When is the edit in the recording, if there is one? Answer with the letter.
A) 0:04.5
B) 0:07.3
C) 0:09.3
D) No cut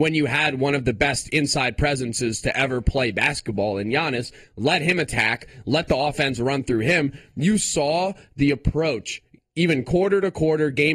D